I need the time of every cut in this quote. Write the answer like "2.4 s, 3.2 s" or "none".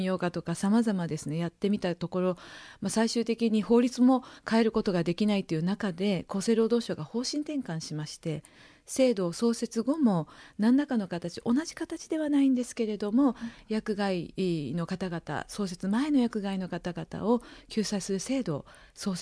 none